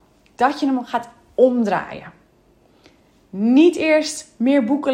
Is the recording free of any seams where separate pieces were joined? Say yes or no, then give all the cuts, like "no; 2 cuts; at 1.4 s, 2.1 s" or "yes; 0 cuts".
yes; 0 cuts